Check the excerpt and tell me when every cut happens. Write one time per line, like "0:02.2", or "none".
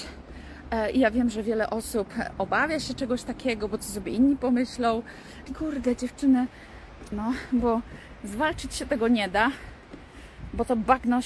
0:05.5
0:07.1